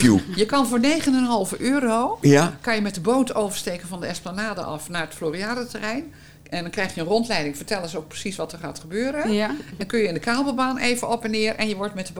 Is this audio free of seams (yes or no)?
yes